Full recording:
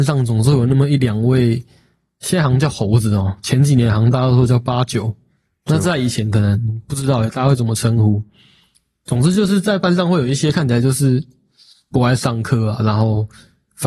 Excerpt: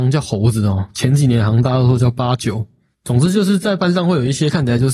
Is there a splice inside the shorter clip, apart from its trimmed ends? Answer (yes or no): yes